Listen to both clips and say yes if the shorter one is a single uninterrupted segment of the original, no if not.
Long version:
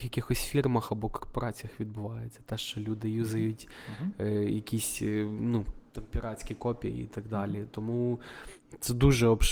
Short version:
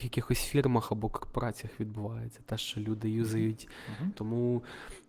no